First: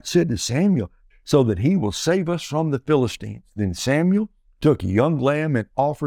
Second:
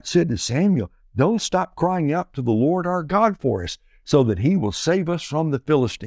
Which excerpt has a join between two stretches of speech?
first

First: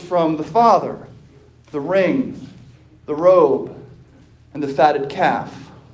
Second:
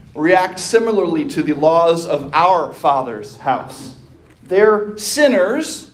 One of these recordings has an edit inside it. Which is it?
second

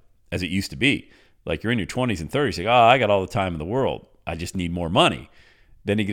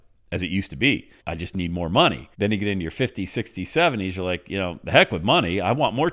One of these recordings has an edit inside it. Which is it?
second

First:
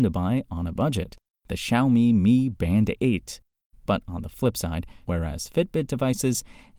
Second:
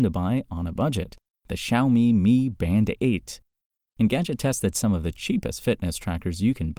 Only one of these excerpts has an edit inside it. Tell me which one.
first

